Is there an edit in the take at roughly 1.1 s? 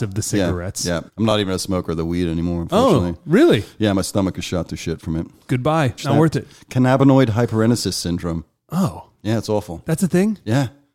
yes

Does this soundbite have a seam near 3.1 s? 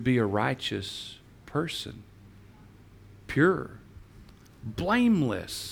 no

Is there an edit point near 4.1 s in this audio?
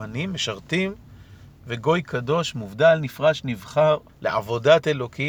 yes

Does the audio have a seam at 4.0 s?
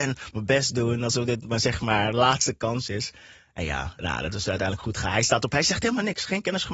yes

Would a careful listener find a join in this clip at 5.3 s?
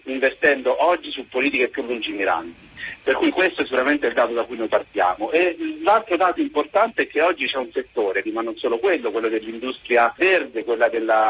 no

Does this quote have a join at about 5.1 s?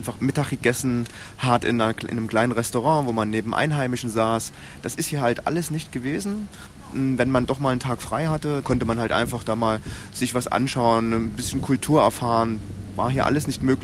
no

